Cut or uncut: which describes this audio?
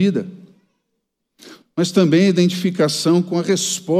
cut